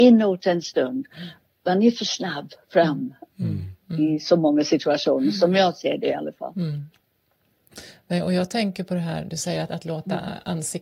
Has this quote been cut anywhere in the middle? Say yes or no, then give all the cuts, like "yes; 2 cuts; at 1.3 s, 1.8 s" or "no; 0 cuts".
no; 0 cuts